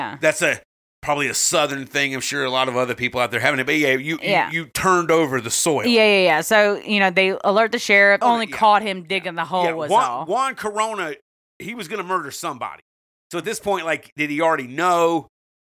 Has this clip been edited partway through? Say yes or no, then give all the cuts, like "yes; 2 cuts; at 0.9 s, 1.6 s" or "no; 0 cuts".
yes; 1 cut; at 8.2 s